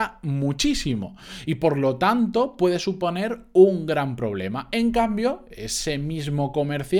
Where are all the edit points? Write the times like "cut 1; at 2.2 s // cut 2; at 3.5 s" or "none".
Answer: none